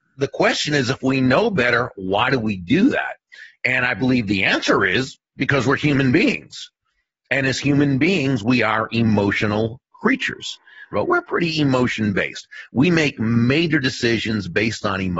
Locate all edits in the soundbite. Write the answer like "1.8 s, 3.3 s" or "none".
10.9 s